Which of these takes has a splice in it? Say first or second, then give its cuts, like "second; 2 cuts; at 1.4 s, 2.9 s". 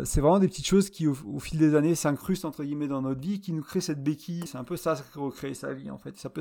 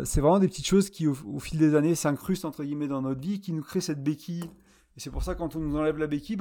first; 1 cut; at 4.5 s